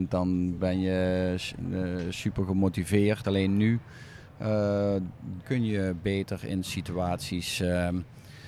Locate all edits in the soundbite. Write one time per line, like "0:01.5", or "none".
0:03.2
0:05.4

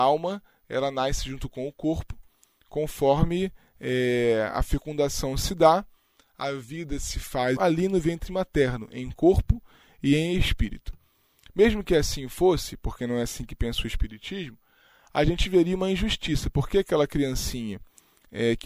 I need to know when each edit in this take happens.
0:07.6

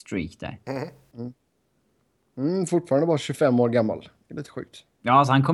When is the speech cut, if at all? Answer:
none

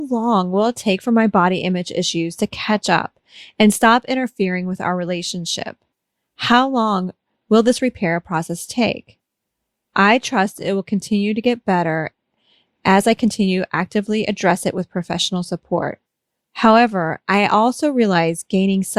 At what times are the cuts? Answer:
none

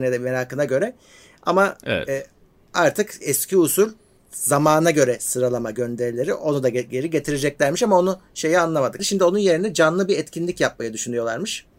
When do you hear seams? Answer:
0:03.2
0:09.0

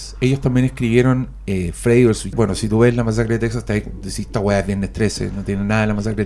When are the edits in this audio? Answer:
0:02.3

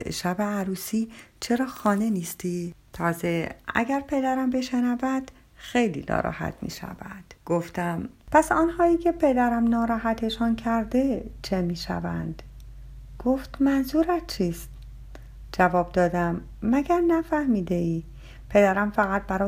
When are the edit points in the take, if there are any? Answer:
0:07.4

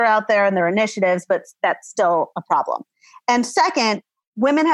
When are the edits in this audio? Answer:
none

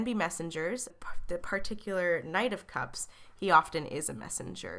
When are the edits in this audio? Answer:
0:00.9

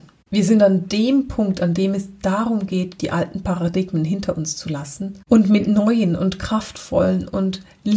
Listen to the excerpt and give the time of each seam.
none

